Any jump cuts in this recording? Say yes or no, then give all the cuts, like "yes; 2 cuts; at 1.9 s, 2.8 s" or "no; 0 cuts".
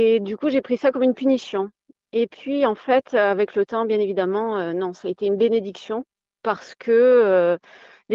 no; 0 cuts